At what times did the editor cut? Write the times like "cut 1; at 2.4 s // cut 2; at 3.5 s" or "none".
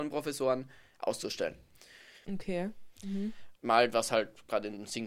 cut 1; at 2.2 s // cut 2; at 3.6 s